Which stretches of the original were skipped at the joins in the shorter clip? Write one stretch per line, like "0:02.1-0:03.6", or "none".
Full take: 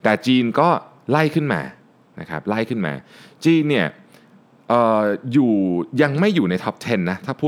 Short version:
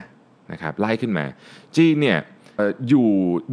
0:04.3-0:05.0